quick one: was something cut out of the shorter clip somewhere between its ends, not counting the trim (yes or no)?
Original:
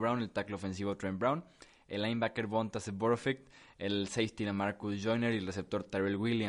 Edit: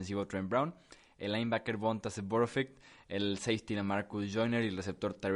no